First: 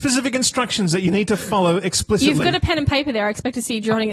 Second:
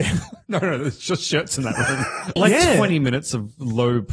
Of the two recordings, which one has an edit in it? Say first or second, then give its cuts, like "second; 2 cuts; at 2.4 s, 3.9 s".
second; 1 cut; at 2.4 s